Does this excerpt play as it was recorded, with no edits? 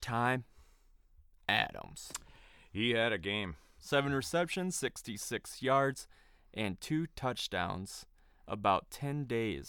yes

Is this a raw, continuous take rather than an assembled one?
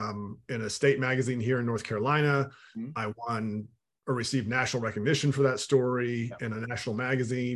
yes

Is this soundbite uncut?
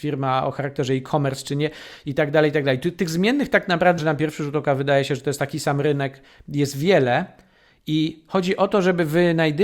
no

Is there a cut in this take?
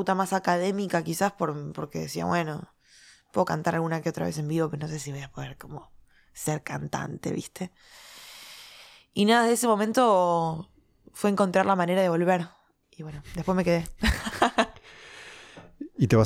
yes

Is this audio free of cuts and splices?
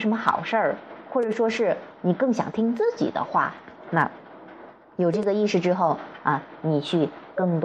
yes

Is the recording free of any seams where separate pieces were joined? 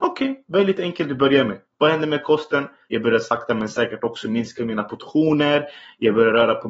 no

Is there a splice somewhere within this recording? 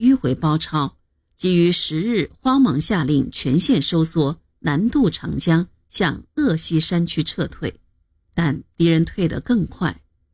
yes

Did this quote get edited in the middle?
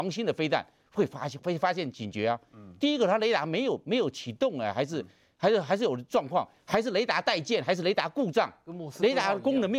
no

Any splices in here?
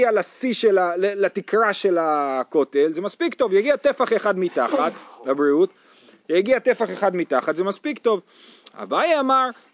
no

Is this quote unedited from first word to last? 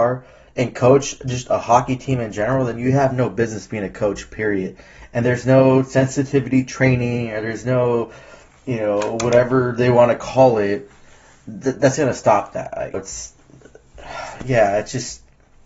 no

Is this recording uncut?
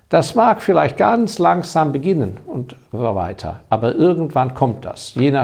yes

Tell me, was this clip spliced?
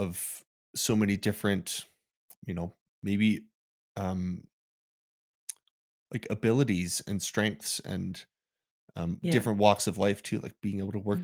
no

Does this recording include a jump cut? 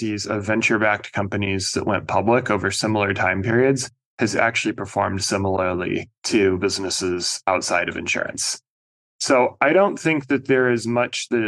no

